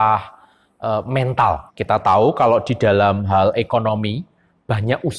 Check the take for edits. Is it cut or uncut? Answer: cut